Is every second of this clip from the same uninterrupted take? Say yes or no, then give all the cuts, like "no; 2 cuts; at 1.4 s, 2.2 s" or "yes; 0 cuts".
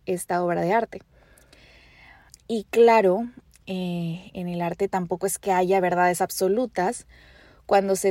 no; 1 cut; at 2.3 s